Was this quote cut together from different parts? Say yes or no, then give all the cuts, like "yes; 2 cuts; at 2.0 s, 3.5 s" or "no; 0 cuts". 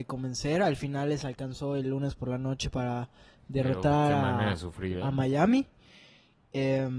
no; 0 cuts